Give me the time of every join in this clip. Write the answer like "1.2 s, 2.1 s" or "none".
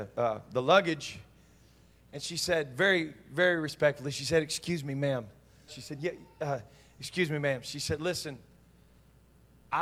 5.7 s